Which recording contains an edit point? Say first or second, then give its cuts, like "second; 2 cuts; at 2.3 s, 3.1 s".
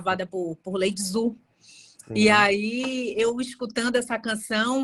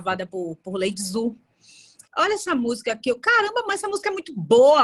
second; 1 cut; at 2.0 s